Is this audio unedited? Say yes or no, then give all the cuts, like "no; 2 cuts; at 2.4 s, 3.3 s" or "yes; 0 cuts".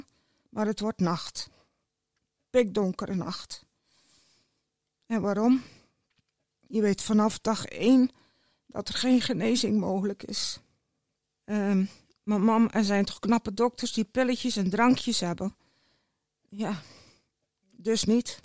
no; 2 cuts; at 11.2 s, 16.4 s